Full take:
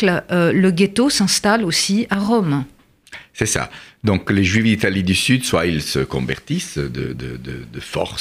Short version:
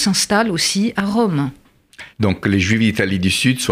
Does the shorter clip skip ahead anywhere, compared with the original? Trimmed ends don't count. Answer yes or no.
yes